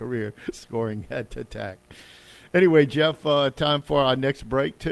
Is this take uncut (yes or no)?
yes